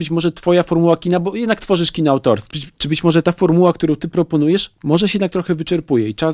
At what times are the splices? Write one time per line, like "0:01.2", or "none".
0:02.5